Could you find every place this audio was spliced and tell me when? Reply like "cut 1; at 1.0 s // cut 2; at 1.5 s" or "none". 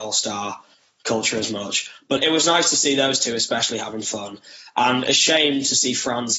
cut 1; at 2.2 s